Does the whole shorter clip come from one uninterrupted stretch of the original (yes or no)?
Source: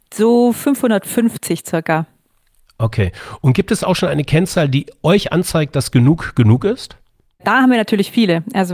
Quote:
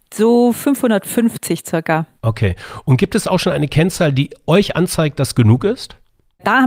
no